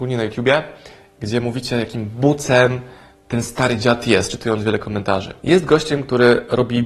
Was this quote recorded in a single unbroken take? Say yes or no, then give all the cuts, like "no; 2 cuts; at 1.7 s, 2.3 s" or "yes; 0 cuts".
no; 1 cut; at 5.4 s